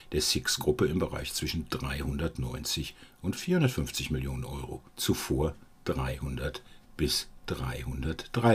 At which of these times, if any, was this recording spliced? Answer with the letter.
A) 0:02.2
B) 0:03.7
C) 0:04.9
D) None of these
C